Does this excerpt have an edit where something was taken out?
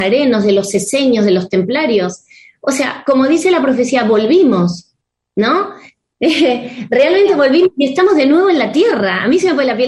no; 0 cuts

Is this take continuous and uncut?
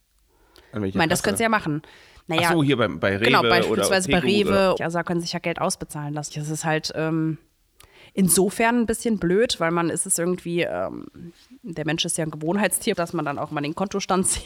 no; 3 cuts; at 4.8 s, 6.3 s, 12.9 s

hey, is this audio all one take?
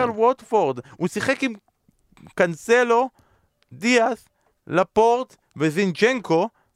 yes; 0 cuts

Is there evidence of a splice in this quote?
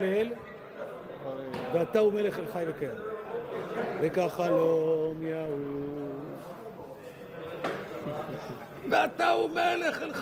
no; 0 cuts

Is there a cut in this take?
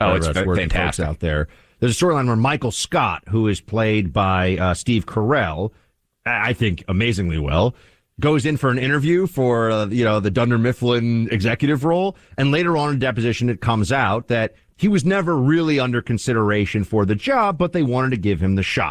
no; 0 cuts

